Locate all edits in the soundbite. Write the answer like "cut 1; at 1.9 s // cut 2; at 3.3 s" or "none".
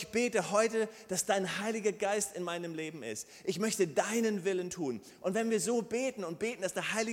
none